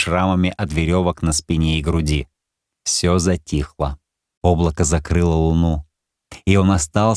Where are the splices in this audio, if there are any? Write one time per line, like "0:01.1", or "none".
0:02.7
0:04.4